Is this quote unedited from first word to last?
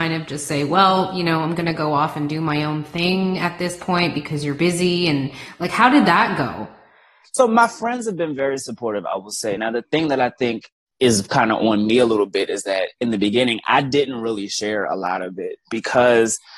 yes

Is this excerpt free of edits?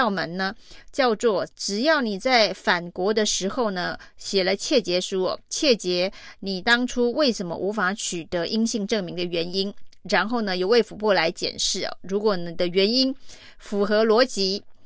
yes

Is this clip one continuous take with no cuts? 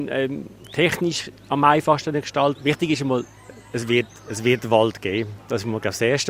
no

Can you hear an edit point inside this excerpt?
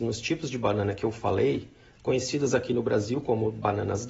yes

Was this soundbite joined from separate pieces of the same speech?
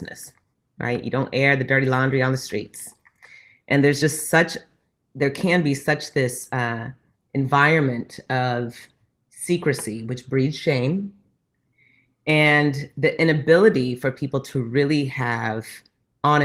no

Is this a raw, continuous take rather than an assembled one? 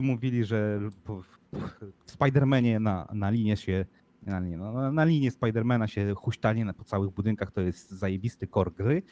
no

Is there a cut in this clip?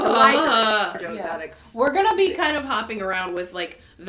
yes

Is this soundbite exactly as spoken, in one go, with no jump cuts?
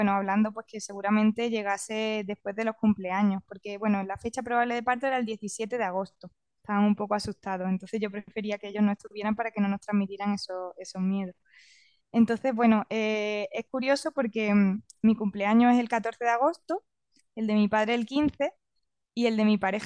no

